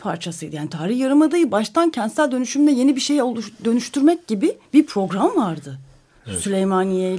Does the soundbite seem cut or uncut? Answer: cut